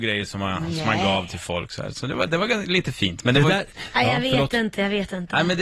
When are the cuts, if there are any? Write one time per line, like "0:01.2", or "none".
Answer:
none